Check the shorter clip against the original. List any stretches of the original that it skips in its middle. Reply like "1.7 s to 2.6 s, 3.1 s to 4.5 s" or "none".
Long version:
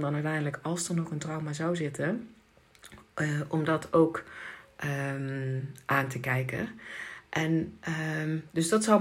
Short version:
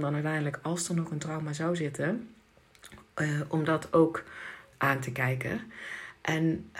4.7 s to 5.8 s

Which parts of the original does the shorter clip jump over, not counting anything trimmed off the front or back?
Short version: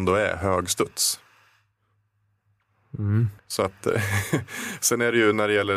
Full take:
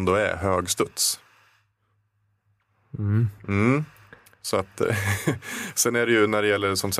3.4 s to 4.3 s

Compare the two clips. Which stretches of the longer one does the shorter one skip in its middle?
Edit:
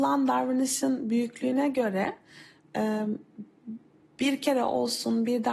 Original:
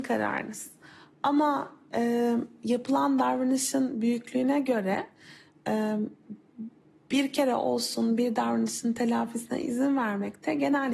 none

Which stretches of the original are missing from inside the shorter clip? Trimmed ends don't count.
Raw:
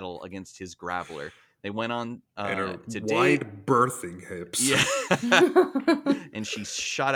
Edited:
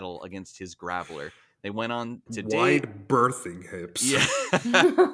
2.3 s to 2.8 s

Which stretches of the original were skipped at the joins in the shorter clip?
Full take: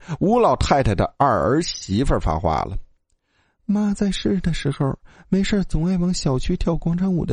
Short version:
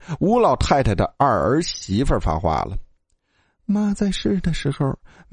none

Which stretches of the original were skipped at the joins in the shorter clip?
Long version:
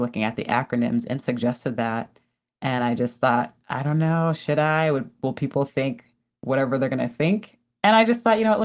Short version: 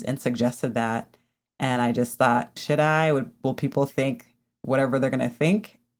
3.6 s to 4.4 s

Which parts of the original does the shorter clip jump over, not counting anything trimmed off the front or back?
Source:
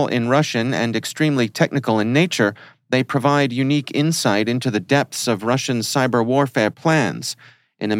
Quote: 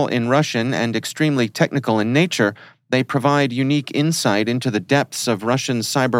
none

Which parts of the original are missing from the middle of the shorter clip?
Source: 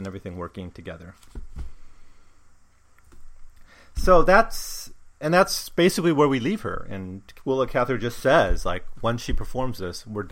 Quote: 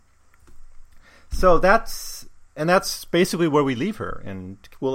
none

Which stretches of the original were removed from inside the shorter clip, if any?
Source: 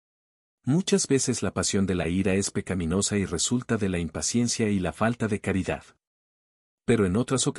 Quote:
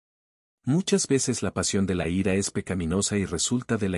none

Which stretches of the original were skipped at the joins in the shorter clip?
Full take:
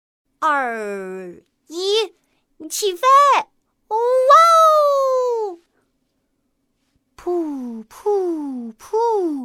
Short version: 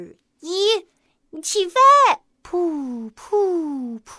3.6 s to 7.0 s

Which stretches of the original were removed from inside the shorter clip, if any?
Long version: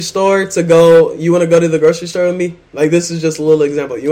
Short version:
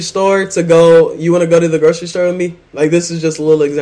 none

